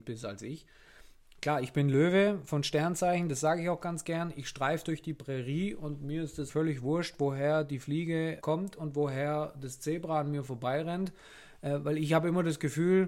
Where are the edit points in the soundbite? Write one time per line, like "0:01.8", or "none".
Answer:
0:06.5
0:08.4